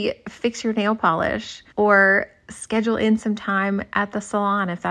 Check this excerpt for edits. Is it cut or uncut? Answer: cut